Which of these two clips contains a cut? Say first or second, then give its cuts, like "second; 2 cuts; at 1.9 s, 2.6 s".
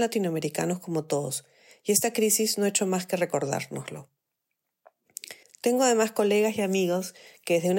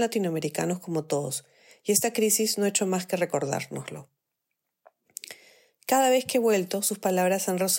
first; 1 cut; at 5.4 s